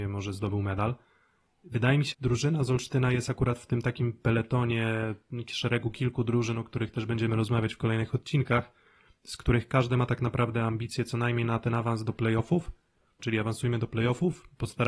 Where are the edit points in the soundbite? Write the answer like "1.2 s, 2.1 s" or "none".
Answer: 2.1 s, 13.2 s